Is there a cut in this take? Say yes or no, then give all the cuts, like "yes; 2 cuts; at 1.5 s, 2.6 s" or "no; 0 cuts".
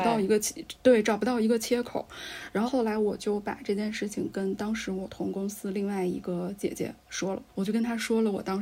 yes; 2 cuts; at 2.6 s, 7.5 s